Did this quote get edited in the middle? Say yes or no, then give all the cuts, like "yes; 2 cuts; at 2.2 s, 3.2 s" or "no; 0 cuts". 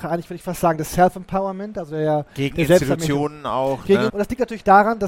yes; 1 cut; at 4.1 s